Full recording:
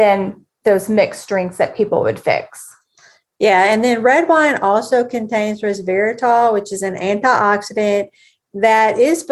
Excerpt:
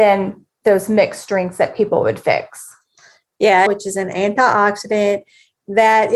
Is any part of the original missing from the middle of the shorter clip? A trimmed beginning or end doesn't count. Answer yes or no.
yes